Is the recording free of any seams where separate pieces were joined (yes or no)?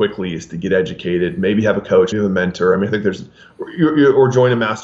no